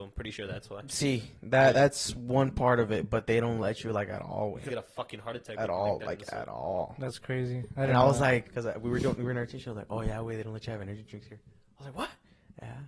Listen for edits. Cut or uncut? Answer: cut